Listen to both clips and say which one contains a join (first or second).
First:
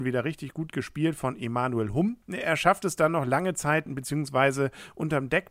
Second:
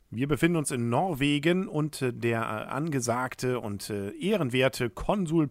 first